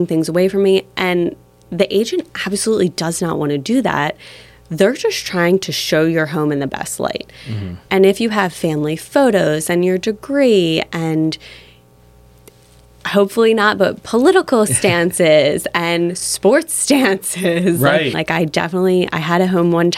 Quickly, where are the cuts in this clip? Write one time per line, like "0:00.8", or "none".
0:18.1